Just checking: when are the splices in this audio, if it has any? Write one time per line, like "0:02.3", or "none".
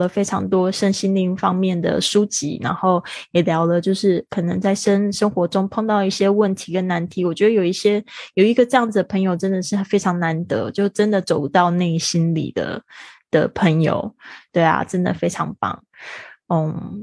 0:14.5